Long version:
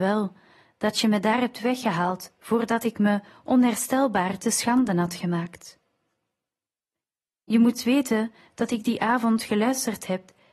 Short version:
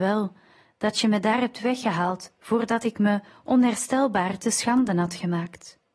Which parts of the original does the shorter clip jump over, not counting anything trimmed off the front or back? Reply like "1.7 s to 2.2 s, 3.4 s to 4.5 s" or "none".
none